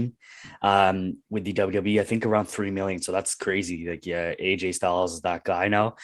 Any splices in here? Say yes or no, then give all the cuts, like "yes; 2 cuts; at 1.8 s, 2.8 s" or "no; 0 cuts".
no; 0 cuts